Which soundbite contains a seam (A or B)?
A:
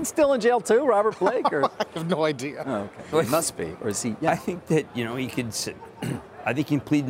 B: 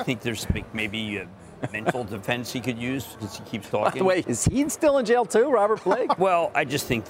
B